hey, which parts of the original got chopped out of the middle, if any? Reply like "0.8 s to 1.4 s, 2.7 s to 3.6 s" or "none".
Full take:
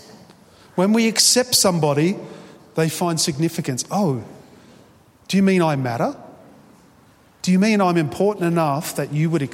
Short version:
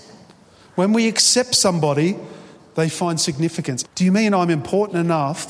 3.9 s to 7.3 s

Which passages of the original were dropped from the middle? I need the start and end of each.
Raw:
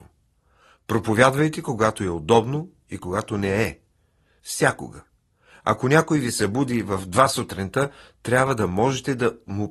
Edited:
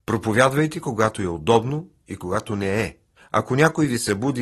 4.0 s to 5.5 s

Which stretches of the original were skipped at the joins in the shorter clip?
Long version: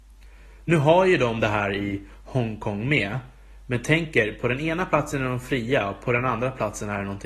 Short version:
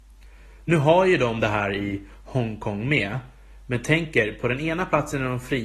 none

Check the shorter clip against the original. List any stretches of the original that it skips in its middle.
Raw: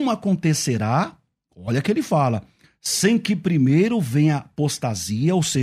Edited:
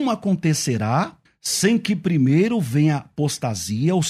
1.3 s to 2.7 s

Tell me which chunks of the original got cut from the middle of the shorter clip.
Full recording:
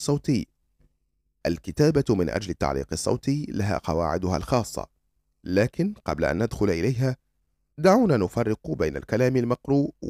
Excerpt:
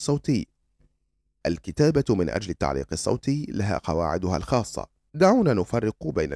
5.1 s to 7.7 s

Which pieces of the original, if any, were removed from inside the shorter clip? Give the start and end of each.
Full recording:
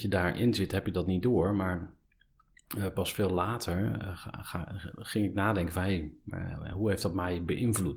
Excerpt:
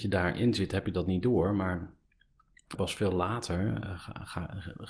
2.8 s to 2.9 s

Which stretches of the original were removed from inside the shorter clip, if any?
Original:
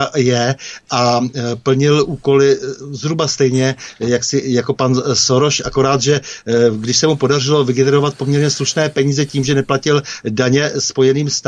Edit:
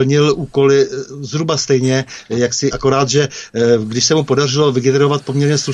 4.4 s to 5.6 s

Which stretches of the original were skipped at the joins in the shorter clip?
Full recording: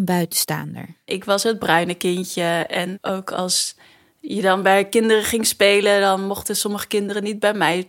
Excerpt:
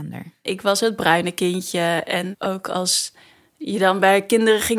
none

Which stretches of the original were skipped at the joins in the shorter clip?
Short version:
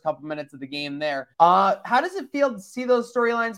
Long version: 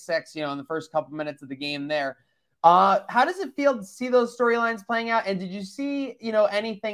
2.2 s to 2.6 s

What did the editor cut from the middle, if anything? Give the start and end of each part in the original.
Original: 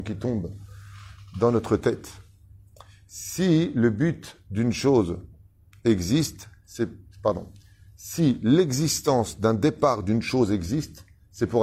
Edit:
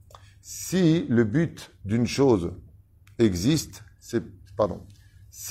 none

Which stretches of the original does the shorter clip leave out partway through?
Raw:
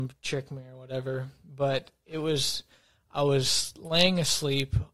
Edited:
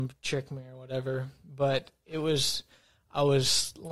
none

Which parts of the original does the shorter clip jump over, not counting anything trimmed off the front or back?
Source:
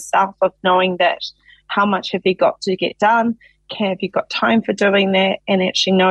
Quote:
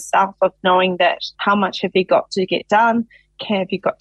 1.3 s to 1.6 s

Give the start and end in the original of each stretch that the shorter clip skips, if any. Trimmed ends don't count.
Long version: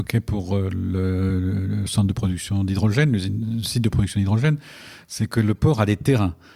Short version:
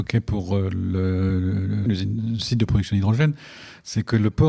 1.9 s to 3.1 s

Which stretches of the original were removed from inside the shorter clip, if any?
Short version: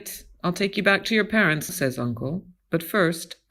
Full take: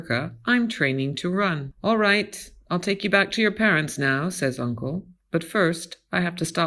4.0 s to 4.3 s

